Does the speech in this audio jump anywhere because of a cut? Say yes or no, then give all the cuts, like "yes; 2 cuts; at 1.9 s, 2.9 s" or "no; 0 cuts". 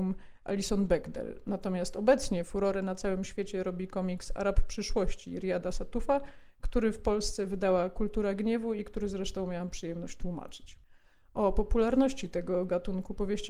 no; 0 cuts